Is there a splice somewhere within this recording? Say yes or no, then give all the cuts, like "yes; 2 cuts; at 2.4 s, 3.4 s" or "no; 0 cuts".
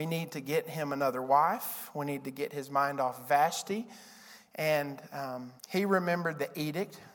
yes; 2 cuts; at 4.5 s, 5.6 s